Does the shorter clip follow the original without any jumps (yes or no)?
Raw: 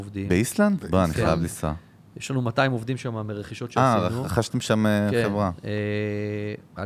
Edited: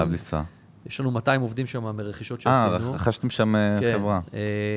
yes